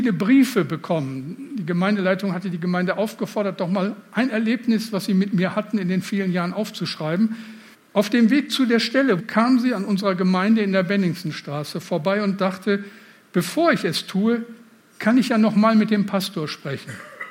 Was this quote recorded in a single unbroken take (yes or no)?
no